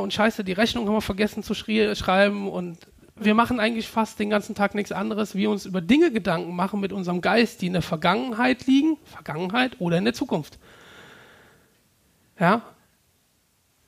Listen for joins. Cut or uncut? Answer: uncut